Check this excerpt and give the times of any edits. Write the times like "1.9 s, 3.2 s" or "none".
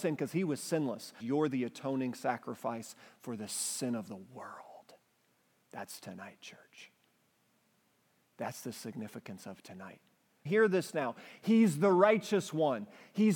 1.2 s, 10.5 s